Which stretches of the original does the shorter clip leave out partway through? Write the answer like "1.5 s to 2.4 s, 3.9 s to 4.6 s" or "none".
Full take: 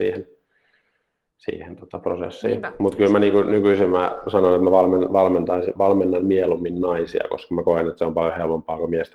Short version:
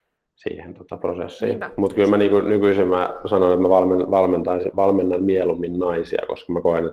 none